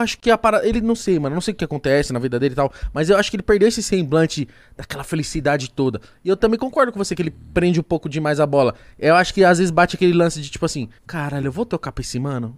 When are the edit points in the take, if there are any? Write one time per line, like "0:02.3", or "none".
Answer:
0:11.0